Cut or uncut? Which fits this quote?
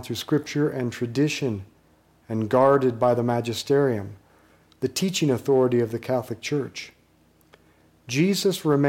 uncut